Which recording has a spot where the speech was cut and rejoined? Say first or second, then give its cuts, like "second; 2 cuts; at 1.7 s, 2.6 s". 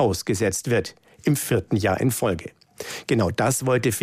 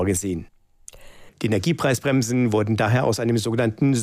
second; 1 cut; at 1.3 s